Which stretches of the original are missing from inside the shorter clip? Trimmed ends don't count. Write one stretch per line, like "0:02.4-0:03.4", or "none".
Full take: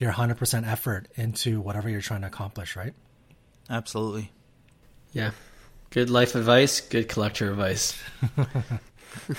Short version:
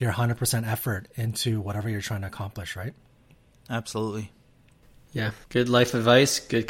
0:05.4-0:05.8